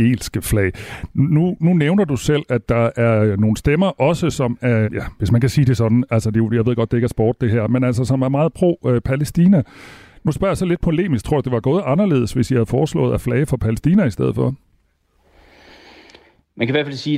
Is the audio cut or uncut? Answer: cut